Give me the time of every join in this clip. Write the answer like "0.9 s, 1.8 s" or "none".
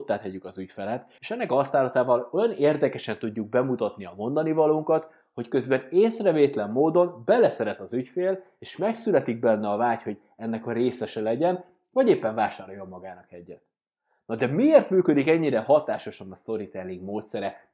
1.2 s